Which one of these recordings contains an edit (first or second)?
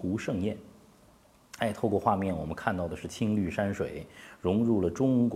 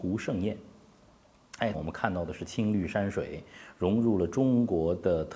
second